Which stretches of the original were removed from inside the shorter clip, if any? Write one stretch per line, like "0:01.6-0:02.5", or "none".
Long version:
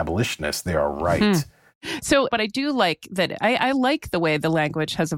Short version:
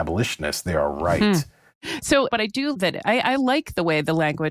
0:02.7-0:03.1